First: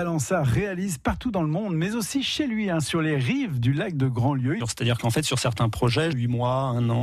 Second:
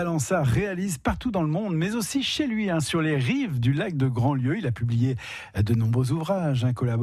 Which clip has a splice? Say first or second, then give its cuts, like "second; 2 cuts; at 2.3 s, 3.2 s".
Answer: first; 2 cuts; at 4.6 s, 6.1 s